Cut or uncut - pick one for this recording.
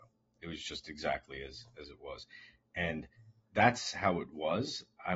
uncut